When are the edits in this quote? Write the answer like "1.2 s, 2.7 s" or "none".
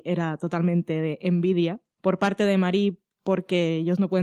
1.9 s